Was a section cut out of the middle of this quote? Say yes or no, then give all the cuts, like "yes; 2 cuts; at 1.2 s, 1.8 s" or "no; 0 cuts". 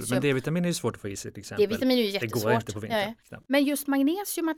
no; 0 cuts